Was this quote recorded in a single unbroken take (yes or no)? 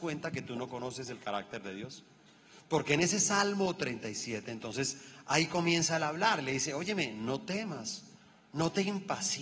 yes